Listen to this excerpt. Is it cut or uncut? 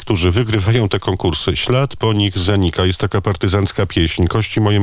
uncut